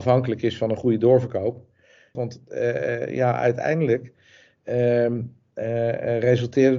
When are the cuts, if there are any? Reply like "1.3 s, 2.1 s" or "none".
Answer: 2.1 s